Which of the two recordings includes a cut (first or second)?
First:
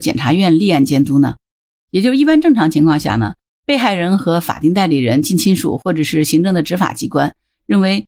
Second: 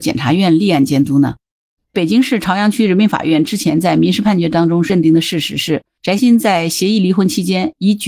second